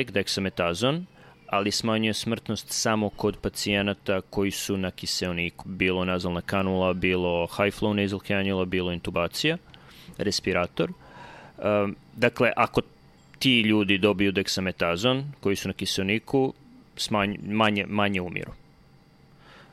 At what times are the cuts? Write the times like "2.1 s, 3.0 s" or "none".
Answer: 5.6 s